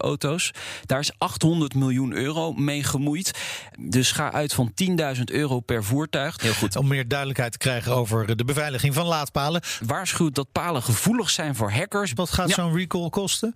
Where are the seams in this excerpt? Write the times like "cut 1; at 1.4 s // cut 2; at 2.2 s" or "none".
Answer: cut 1; at 6.4 s // cut 2; at 9.8 s // cut 3; at 12.2 s